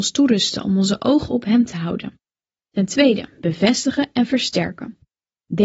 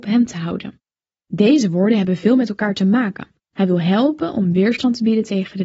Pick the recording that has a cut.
second; 2 cuts; at 1.2 s, 3.4 s

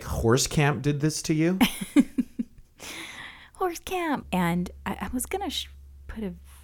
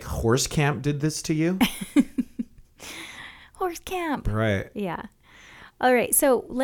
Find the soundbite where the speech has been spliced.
first; 1 cut; at 4.2 s

